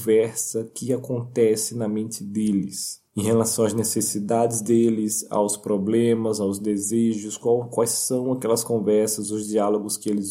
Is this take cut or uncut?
cut